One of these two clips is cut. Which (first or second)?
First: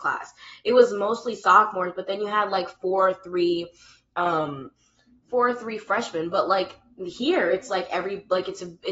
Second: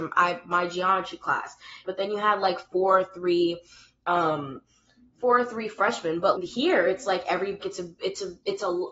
second